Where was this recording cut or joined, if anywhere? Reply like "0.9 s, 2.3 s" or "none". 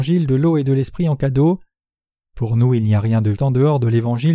3.4 s